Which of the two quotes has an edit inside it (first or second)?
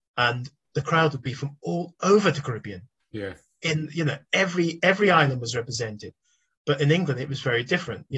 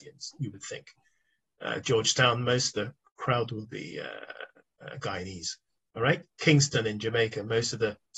first